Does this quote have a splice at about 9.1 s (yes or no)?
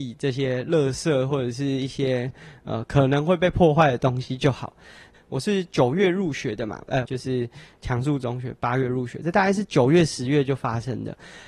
no